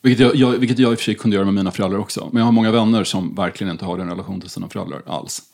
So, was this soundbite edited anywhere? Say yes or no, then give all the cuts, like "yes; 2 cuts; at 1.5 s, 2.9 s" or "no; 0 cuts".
no; 0 cuts